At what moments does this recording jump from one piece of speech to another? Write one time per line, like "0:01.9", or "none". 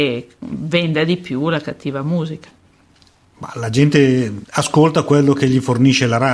none